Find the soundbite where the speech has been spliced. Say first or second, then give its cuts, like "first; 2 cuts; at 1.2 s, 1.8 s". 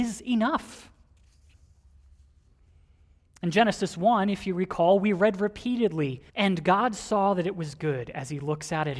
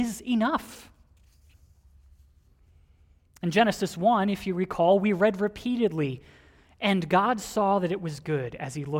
first; 1 cut; at 6.3 s